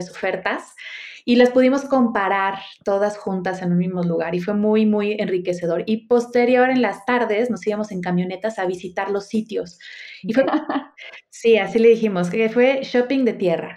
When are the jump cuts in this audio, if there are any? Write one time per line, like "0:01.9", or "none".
0:10.5